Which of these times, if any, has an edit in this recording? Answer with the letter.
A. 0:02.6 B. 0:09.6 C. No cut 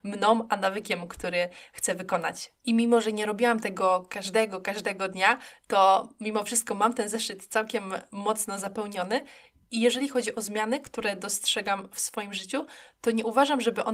C